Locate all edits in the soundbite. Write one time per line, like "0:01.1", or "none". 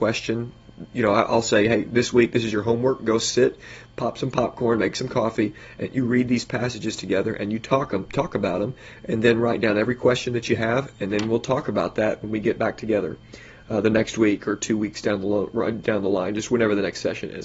none